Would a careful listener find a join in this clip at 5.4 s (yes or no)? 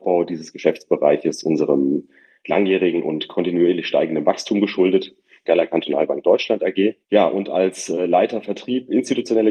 yes